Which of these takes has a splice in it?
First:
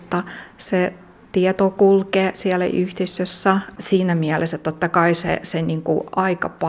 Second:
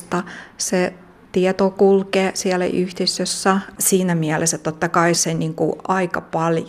second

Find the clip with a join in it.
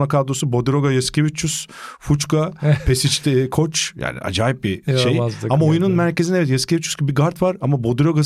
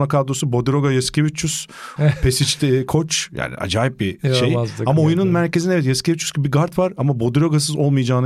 second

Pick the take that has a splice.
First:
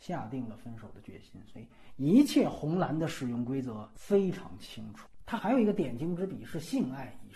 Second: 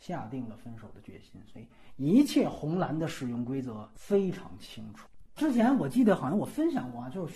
second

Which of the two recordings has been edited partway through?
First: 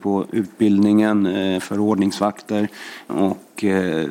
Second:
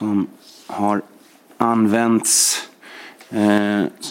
first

